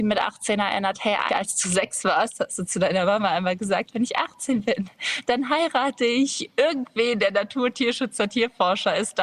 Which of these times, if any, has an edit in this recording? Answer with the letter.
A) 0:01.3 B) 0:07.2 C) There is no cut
A